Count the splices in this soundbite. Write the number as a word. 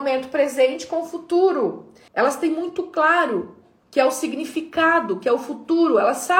one